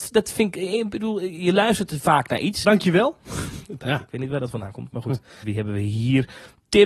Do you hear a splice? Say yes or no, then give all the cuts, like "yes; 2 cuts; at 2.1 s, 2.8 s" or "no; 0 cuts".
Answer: yes; 3 cuts; at 2.6 s, 3.8 s, 5.4 s